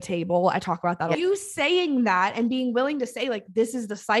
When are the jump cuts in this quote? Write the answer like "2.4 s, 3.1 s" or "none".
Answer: 1.1 s